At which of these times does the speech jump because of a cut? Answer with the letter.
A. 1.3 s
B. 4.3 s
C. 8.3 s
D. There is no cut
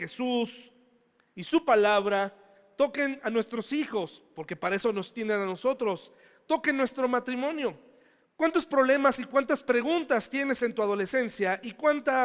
C